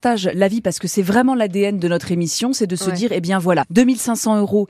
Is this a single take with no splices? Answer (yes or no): yes